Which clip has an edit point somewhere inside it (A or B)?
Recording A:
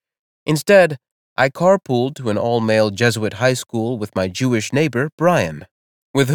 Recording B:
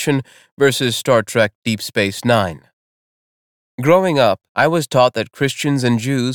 B